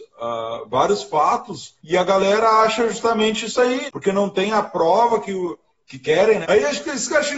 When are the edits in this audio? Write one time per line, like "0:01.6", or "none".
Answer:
0:01.8
0:03.9
0:06.4